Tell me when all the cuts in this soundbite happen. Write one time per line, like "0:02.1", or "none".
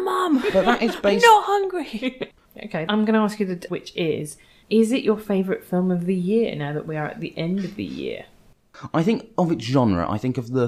0:03.7